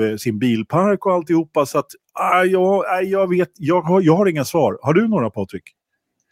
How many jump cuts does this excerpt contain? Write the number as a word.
zero